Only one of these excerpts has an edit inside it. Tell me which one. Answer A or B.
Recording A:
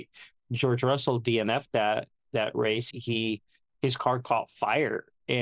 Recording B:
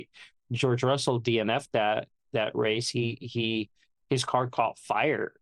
A